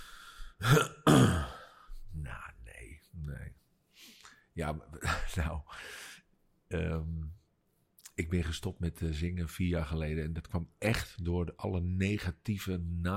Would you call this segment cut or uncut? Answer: uncut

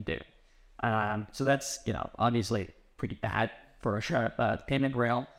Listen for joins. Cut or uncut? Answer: uncut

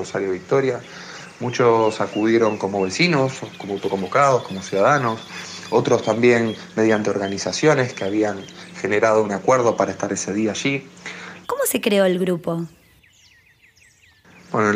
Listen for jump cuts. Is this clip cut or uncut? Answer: cut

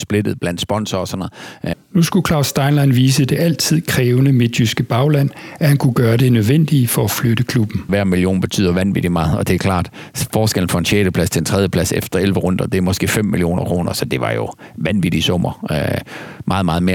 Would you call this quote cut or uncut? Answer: cut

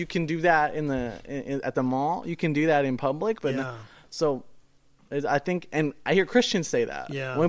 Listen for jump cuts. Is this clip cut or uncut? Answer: uncut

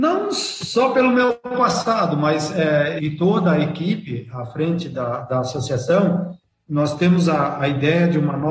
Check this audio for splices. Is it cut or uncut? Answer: cut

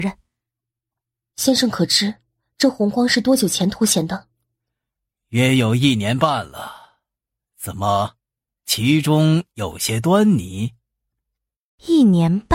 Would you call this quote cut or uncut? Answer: uncut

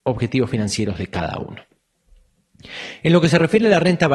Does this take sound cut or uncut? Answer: uncut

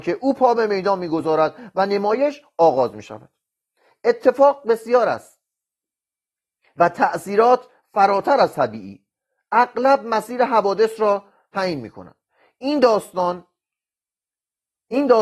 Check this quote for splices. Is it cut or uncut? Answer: uncut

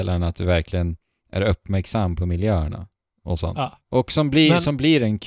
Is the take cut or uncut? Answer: cut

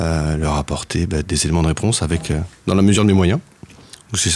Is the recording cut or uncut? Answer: cut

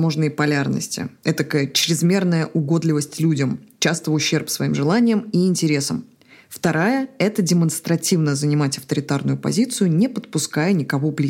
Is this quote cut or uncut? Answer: cut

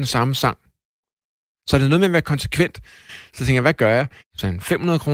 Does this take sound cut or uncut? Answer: cut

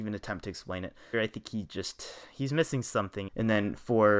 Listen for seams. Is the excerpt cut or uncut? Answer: cut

